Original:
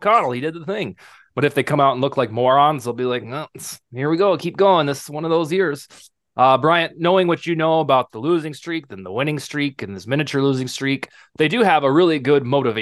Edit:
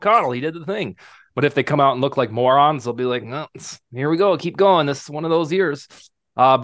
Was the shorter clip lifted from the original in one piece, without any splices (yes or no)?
yes